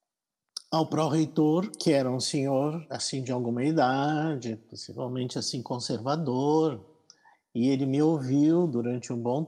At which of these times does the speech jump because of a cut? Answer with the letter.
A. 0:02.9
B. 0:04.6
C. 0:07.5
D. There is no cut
D